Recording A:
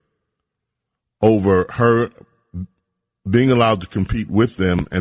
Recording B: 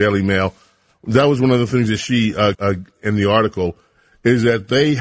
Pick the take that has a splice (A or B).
B